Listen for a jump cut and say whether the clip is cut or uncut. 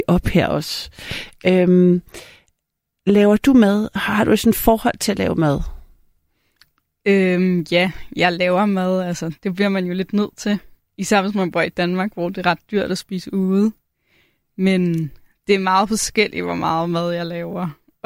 uncut